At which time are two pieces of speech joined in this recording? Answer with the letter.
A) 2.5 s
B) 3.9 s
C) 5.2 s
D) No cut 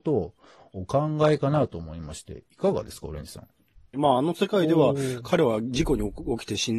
B